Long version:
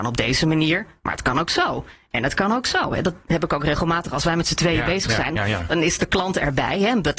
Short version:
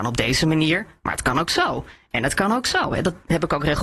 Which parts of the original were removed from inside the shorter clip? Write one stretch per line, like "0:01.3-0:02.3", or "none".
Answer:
none